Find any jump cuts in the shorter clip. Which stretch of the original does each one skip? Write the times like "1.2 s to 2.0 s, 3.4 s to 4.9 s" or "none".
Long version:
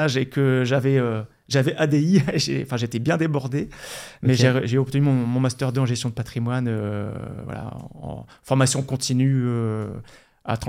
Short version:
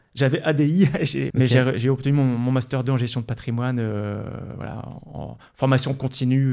2.6 s to 4.2 s